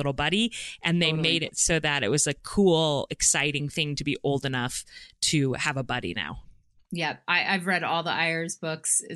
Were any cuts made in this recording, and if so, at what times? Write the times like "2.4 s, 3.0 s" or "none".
none